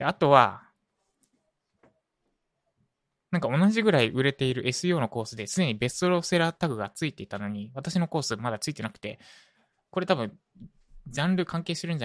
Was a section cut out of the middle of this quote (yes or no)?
no